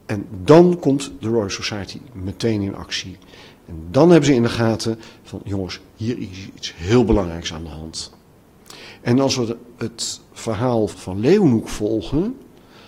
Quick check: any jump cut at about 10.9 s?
yes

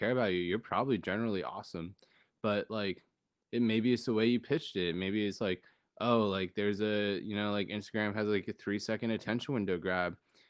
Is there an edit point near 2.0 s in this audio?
no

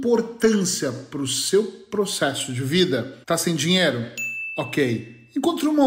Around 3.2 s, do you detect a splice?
yes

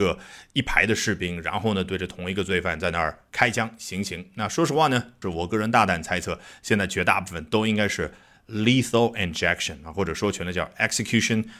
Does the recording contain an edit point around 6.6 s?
no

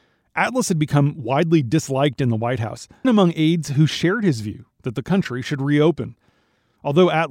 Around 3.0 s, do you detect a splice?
yes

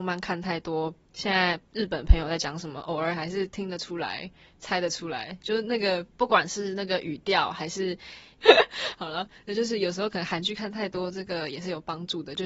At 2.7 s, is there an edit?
no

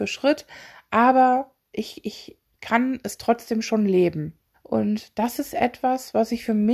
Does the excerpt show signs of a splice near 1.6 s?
no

